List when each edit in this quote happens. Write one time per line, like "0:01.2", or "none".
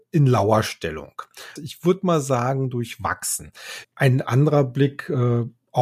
0:01.6
0:03.8